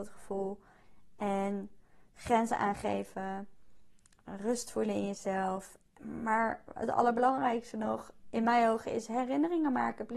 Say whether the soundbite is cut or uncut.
uncut